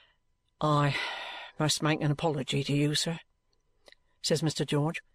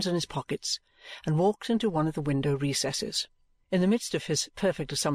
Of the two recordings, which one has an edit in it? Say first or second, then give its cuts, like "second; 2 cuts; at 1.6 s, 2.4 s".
second; 1 cut; at 3.6 s